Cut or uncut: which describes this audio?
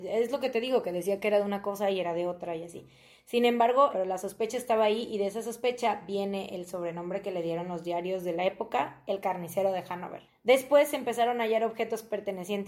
cut